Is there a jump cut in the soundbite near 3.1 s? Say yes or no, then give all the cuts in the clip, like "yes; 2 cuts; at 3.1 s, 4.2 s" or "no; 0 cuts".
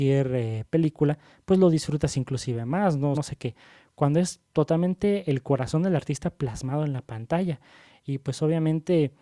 yes; 1 cut; at 3.1 s